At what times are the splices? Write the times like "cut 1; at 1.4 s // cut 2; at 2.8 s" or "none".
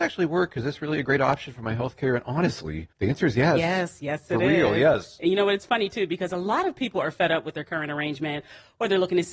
cut 1; at 2.9 s